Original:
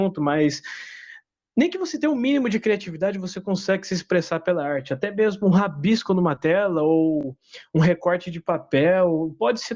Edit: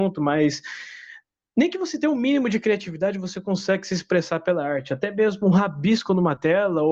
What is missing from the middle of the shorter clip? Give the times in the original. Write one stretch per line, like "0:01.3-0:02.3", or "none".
none